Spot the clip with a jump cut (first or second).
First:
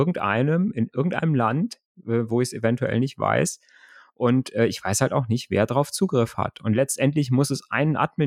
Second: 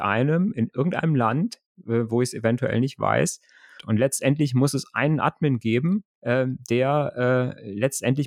second